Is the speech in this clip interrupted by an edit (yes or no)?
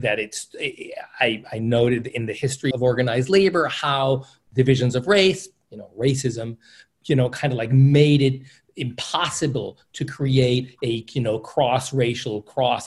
yes